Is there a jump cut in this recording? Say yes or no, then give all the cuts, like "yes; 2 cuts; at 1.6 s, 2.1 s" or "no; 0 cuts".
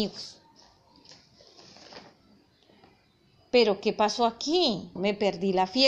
yes; 1 cut; at 5.0 s